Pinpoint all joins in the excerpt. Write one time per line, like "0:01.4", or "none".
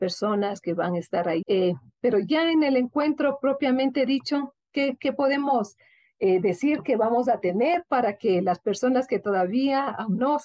0:01.4